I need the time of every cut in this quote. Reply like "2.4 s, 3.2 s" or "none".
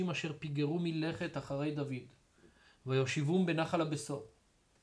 none